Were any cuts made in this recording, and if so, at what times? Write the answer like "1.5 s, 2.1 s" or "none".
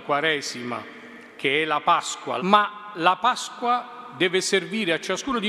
2.4 s